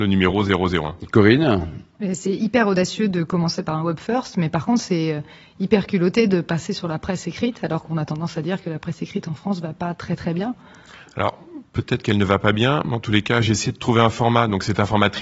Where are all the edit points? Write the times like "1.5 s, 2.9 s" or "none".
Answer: none

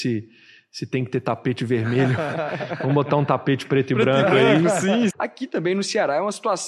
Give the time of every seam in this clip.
5.1 s

